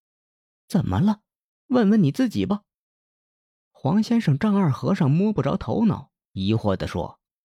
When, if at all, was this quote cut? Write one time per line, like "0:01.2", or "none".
none